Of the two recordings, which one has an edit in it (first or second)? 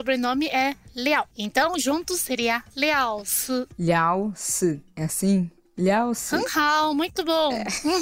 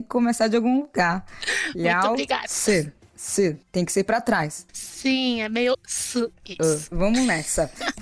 second